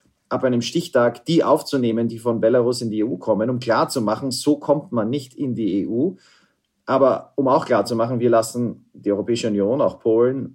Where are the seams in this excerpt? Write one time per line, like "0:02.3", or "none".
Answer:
none